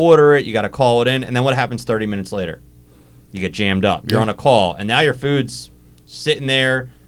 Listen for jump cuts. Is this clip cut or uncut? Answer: uncut